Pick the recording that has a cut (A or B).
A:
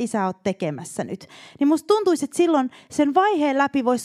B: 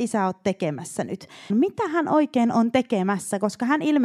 B